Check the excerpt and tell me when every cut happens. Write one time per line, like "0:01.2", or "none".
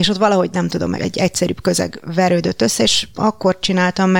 0:01.0